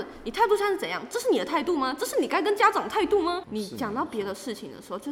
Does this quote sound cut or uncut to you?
cut